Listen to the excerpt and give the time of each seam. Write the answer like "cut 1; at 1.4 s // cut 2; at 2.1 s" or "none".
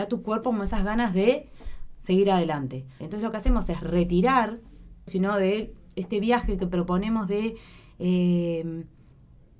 cut 1; at 3.0 s // cut 2; at 5.1 s